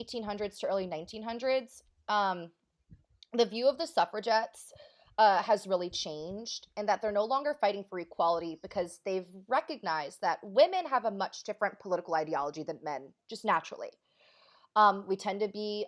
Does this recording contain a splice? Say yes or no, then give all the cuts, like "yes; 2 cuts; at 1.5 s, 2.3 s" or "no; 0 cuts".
no; 0 cuts